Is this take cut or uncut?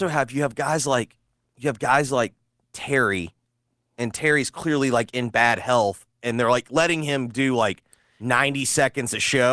uncut